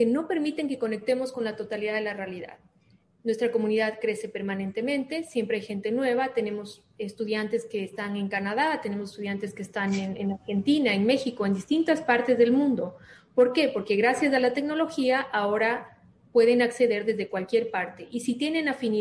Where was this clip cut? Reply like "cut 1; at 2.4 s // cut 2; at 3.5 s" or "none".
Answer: none